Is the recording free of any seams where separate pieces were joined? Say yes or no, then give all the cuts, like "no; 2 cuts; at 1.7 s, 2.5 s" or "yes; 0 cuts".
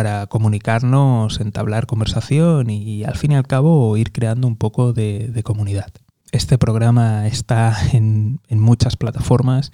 yes; 0 cuts